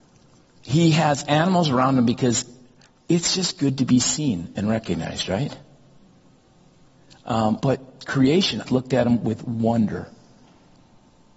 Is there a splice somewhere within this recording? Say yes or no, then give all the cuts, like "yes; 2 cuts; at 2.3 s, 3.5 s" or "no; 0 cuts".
yes; 2 cuts; at 7.6 s, 8.6 s